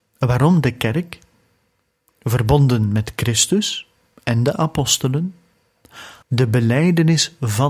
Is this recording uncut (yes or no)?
no